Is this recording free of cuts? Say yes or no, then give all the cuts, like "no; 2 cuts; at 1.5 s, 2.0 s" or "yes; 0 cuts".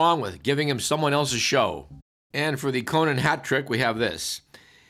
no; 1 cut; at 2.3 s